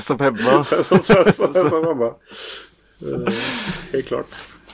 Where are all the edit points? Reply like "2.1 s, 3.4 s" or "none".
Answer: none